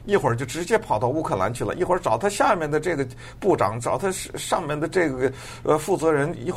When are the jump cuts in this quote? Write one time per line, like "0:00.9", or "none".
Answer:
none